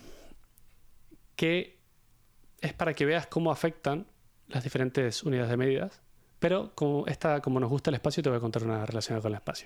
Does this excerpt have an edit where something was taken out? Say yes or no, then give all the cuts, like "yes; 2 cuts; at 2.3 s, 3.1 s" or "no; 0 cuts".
yes; 1 cut; at 6.3 s